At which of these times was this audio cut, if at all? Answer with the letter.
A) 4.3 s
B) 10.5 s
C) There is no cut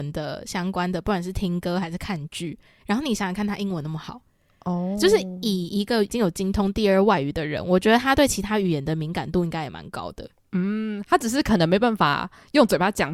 C